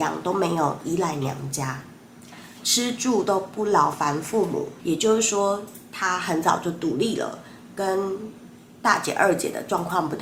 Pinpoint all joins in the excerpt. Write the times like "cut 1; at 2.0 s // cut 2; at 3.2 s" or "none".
cut 1; at 2.6 s // cut 2; at 4.8 s